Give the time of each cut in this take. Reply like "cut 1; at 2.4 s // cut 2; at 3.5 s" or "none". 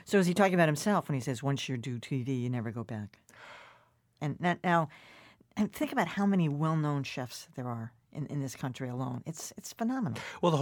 cut 1; at 4.2 s